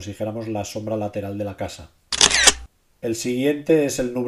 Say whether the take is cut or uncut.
uncut